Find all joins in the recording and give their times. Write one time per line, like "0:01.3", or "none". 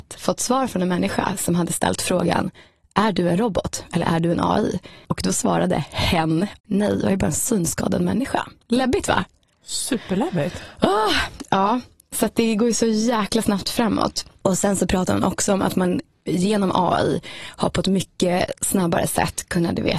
0:06.6